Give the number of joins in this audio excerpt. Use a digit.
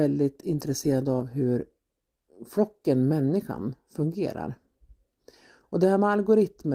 0